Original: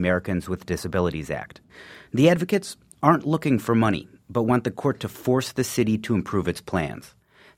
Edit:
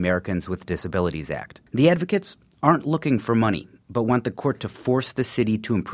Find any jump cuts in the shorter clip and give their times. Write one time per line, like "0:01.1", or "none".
0:01.7